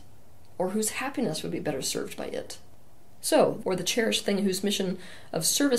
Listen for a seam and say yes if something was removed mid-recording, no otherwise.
yes